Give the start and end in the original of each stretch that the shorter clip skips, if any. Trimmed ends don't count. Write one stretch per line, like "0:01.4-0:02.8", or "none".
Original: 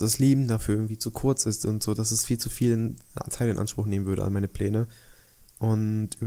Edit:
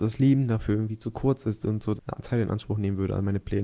0:02.0-0:03.0